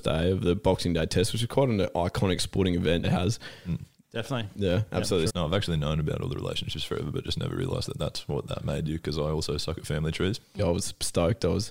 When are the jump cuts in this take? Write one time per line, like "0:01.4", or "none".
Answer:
0:03.0
0:05.3
0:10.6